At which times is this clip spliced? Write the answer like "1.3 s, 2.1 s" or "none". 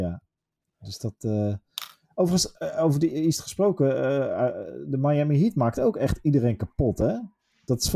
none